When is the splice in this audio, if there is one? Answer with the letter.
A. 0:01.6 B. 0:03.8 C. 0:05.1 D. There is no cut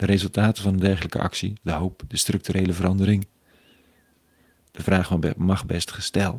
A